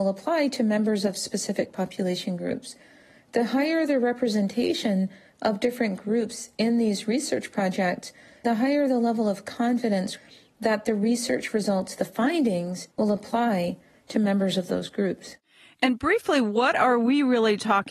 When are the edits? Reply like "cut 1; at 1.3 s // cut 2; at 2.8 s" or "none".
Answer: none